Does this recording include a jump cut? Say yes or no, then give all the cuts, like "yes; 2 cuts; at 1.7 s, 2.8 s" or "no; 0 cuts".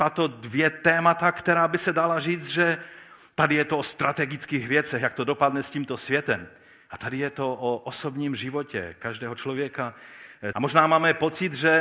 yes; 1 cut; at 10.5 s